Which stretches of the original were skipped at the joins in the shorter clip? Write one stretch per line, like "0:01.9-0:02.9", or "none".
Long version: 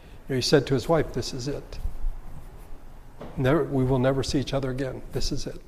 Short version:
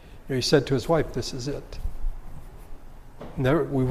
none